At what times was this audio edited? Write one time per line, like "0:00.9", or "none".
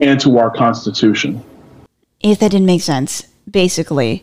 0:02.1